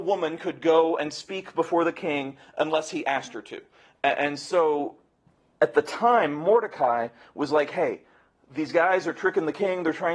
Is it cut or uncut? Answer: uncut